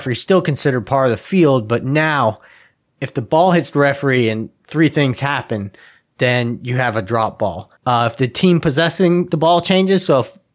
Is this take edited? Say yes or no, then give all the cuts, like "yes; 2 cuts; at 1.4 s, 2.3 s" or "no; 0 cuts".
yes; 1 cut; at 7.8 s